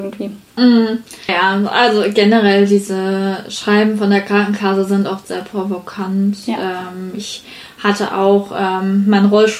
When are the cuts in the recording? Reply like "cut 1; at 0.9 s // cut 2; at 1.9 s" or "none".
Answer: cut 1; at 1.3 s